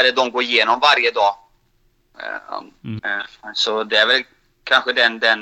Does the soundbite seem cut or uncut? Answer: cut